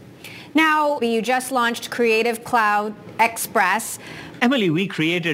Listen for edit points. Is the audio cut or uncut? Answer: cut